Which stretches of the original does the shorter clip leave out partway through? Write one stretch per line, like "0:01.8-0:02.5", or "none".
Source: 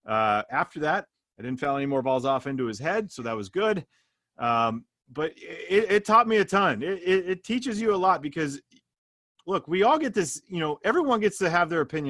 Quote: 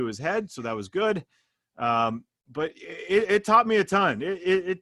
none